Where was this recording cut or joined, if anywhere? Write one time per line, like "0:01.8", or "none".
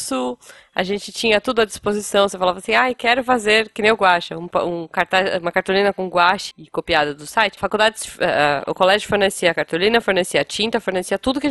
0:06.5
0:07.6